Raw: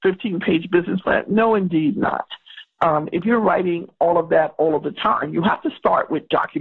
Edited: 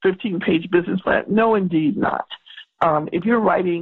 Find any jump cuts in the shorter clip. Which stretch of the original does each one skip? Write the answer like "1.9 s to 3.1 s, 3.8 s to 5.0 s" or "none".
none